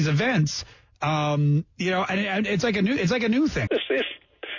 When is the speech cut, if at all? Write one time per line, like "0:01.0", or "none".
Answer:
0:03.7

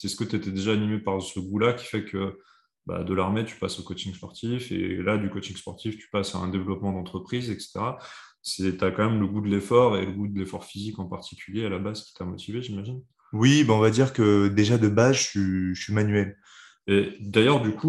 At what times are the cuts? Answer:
0:16.8

